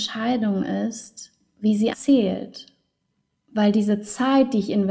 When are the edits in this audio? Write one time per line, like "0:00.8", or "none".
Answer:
0:01.9